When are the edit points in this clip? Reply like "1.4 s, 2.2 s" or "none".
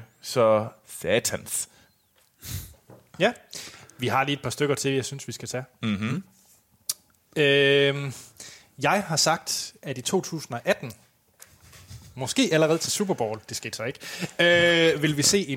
none

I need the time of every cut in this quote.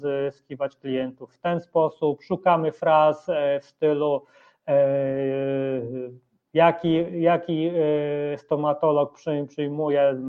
none

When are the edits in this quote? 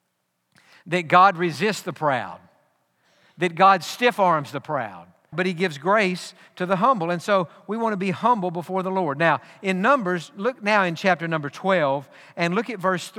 5.3 s

